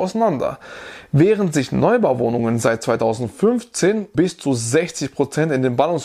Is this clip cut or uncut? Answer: cut